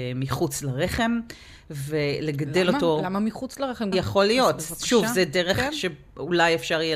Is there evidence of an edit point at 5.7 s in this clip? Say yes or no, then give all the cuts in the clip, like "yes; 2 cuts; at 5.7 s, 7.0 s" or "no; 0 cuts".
no; 1 cut; at 3.9 s